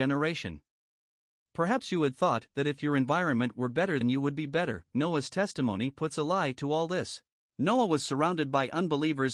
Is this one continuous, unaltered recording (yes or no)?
no